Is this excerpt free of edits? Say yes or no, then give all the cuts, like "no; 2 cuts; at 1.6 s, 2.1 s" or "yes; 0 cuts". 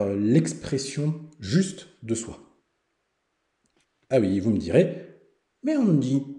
yes; 0 cuts